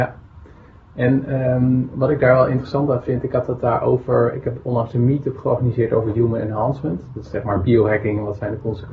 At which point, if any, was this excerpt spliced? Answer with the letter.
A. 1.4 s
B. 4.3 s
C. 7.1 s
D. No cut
D